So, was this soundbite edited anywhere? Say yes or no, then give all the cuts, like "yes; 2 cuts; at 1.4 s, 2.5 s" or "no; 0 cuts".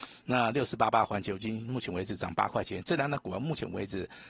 no; 0 cuts